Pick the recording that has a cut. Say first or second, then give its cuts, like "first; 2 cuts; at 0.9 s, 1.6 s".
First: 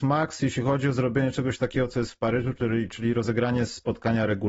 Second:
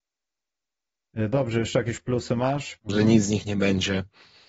second; 1 cut; at 2.8 s